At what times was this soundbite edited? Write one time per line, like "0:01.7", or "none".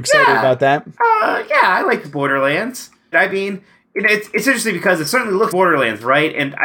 0:03.1
0:05.5